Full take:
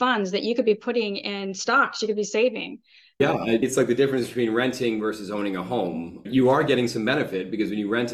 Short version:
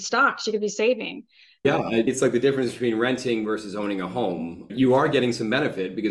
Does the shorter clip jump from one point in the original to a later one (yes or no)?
no